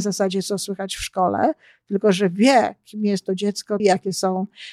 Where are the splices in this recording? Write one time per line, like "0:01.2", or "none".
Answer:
0:03.8